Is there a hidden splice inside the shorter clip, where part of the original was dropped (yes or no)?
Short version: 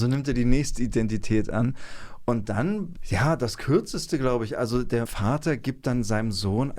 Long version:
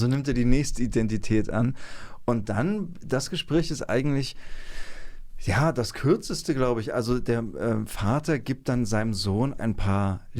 yes